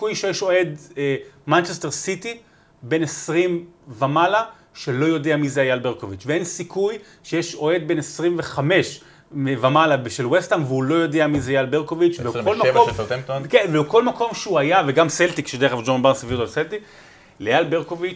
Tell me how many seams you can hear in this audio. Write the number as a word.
zero